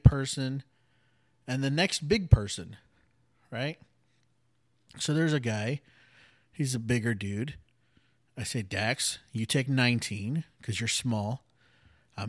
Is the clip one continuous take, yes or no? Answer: yes